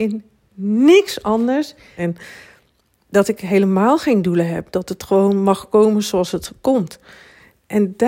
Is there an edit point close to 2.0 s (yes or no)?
yes